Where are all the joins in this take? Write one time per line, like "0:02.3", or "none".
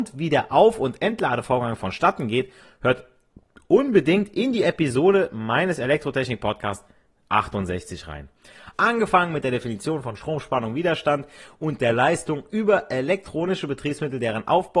0:08.7